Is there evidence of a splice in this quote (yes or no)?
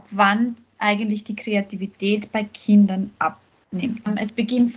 no